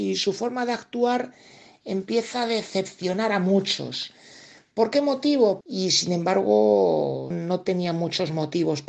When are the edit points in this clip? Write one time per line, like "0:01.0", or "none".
0:05.6
0:07.3